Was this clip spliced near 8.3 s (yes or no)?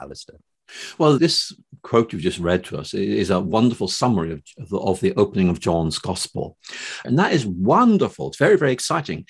no